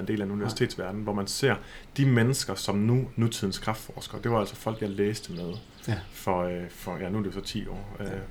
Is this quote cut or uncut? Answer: cut